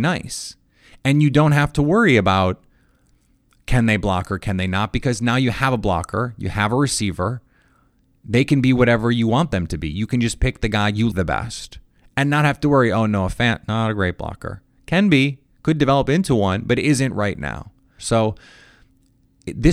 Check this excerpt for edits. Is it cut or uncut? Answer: cut